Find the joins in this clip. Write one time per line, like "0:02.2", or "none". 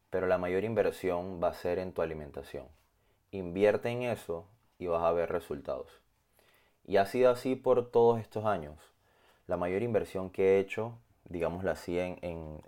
0:11.1